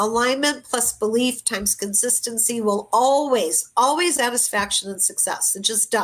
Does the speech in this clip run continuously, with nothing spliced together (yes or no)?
no